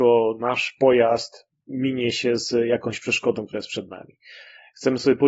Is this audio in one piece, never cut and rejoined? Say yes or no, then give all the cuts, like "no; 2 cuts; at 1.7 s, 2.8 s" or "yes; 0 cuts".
yes; 0 cuts